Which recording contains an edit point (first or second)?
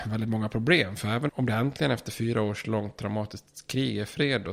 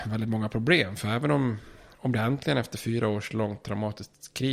first